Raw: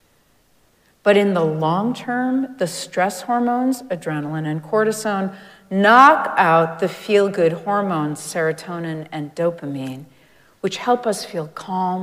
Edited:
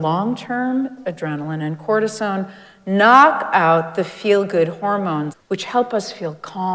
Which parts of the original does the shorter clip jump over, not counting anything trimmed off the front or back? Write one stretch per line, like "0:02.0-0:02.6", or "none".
0:02.6-0:03.8
0:08.2-0:10.4